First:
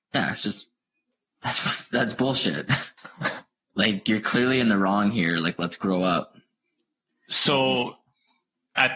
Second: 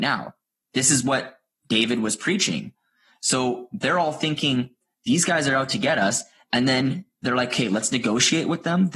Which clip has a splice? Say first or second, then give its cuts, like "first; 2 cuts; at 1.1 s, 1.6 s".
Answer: first; 1 cut; at 3.0 s